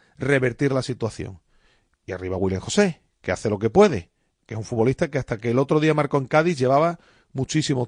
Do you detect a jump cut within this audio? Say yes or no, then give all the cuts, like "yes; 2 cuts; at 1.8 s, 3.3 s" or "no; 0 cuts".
no; 0 cuts